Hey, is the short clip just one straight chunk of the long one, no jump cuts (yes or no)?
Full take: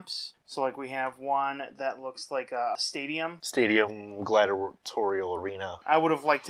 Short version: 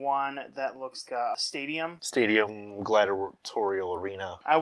no